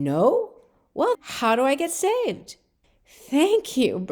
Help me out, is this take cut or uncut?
cut